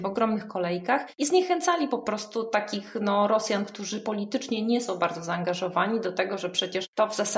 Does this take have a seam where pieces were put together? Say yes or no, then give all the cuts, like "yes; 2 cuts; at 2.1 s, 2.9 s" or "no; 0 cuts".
no; 0 cuts